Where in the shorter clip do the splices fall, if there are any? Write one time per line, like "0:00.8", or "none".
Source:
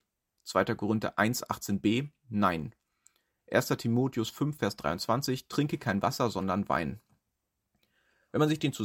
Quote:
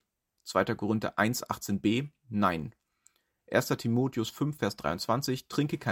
none